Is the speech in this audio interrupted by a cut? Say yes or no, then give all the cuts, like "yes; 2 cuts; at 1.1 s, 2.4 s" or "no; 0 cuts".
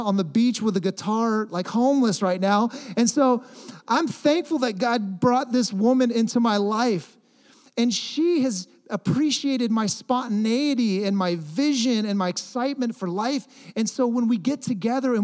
no; 0 cuts